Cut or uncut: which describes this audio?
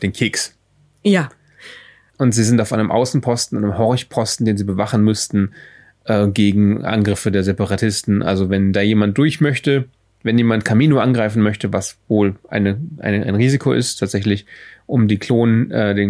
cut